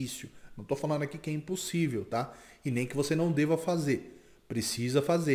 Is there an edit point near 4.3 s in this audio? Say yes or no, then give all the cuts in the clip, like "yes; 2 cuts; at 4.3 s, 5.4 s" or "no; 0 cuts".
no; 0 cuts